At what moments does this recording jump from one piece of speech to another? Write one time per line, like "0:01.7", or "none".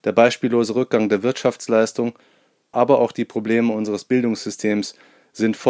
0:02.7